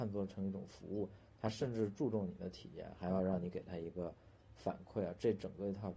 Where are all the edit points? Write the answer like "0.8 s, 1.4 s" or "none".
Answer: none